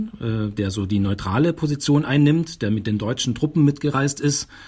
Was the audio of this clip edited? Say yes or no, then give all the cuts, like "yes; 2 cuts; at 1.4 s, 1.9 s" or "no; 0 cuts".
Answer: no; 0 cuts